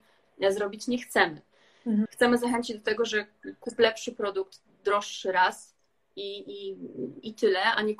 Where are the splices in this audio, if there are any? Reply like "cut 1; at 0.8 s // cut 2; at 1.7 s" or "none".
cut 1; at 2.1 s